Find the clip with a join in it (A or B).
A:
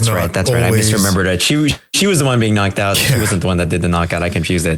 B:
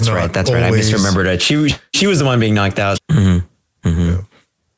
B